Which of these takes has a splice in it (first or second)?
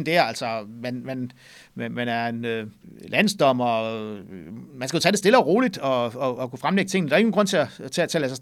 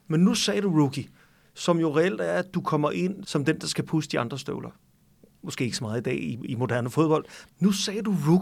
second